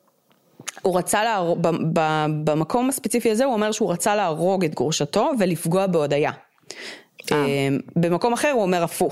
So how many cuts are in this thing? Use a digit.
0